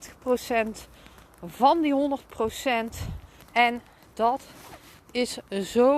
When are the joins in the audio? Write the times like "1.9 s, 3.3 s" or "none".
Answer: 3.4 s